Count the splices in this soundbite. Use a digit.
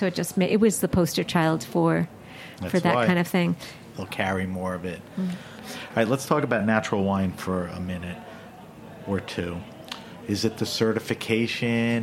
3